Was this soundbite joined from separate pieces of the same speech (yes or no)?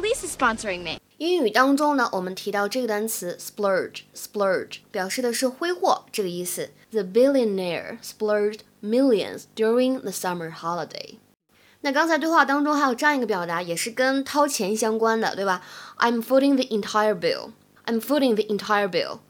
yes